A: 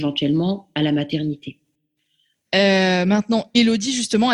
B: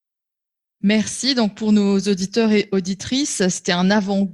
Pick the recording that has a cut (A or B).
A